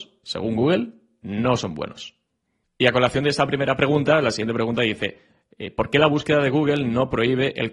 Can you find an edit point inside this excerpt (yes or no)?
no